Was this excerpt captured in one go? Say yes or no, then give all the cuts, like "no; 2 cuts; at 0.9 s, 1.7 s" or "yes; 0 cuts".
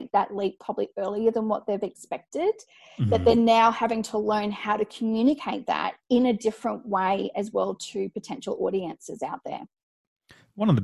yes; 0 cuts